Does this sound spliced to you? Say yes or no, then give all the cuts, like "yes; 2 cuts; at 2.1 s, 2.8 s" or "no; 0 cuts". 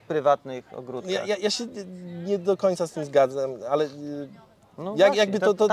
no; 0 cuts